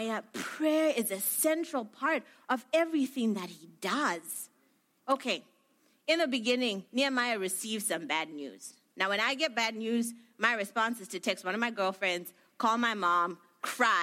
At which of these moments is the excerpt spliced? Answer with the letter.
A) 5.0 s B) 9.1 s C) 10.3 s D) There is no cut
A